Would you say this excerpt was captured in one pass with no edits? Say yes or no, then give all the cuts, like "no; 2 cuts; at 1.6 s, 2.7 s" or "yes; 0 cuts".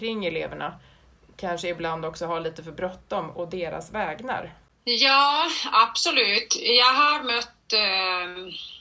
yes; 0 cuts